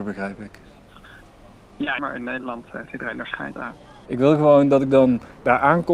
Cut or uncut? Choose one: cut